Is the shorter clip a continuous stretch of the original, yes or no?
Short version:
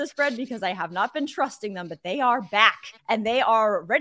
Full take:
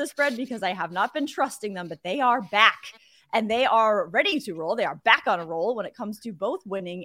no